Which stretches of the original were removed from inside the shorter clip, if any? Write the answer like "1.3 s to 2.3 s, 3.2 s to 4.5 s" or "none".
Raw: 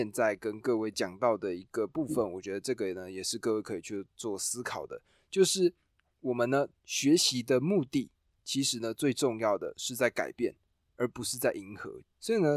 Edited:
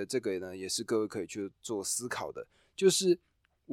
none

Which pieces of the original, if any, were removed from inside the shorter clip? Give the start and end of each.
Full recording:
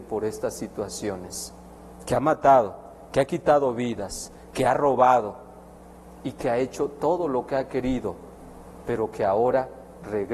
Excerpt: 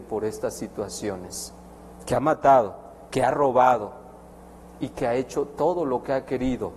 3.1 s to 4.5 s

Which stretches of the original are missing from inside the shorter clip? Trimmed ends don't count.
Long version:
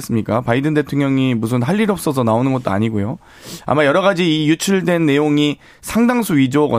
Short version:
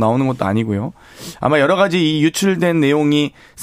none

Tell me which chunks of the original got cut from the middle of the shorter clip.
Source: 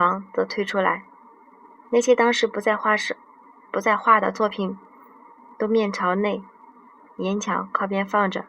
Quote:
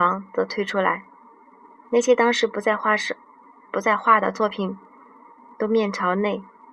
none

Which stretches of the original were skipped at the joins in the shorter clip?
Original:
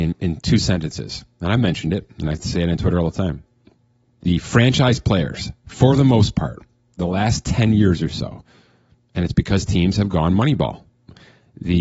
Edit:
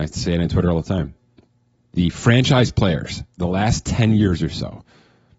5.6 s to 6.9 s

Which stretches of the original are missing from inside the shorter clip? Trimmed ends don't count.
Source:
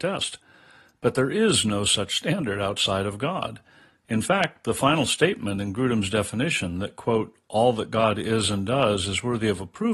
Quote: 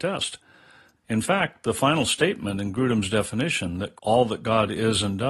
1.0 s to 4.0 s, 7.0 s to 7.4 s

